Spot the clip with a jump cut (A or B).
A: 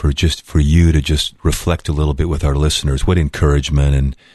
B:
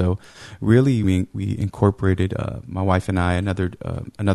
B